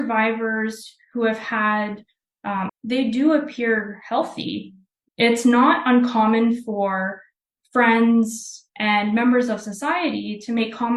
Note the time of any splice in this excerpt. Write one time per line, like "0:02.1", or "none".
0:02.7
0:05.0
0:08.7